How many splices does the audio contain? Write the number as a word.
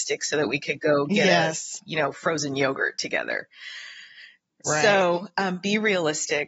zero